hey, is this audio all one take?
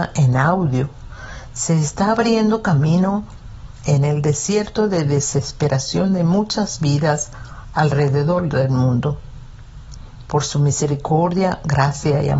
yes; 0 cuts

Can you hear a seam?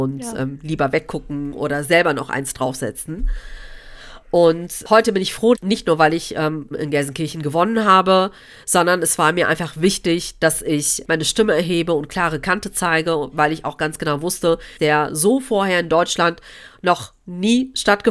yes; 3 cuts; at 5.5 s, 6.7 s, 14.8 s

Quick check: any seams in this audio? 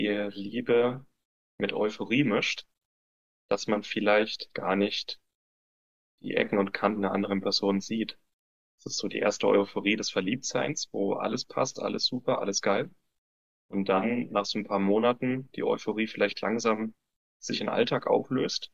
no; 0 cuts

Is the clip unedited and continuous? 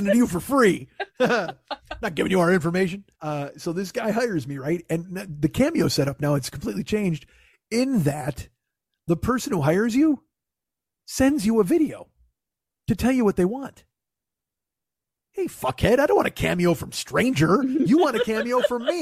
no; 1 cut; at 3.1 s

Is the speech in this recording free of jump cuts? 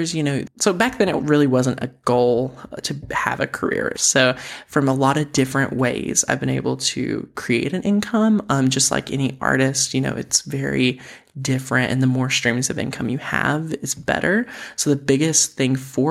no; 1 cut; at 3.9 s

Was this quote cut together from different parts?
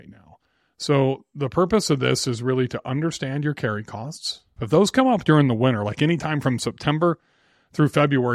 yes; 1 cut; at 4.6 s

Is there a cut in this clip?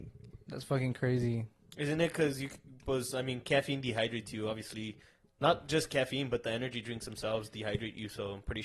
no; 0 cuts

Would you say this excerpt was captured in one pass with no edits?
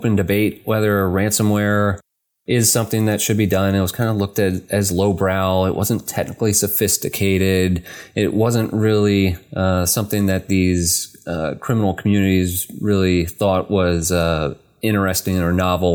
yes; 0 cuts

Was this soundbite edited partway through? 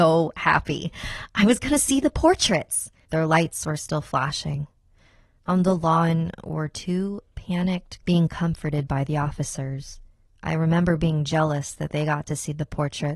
yes; 3 cuts; at 3.0 s, 8.0 s, 10.3 s

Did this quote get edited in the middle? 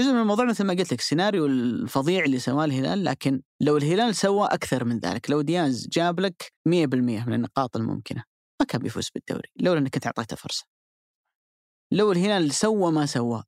yes; 2 cuts; at 3.5 s, 6.6 s

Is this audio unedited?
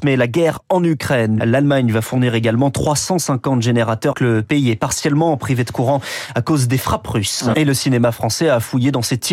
no; 3 cuts; at 1.4 s, 4.1 s, 7.5 s

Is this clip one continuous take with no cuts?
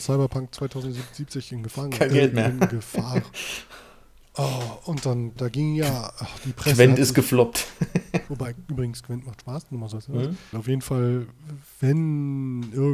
no; 3 cuts; at 5.4 s, 8.3 s, 10.5 s

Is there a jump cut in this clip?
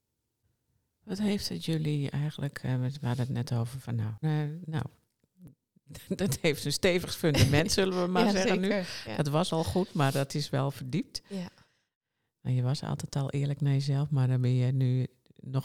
yes; 1 cut; at 4.2 s

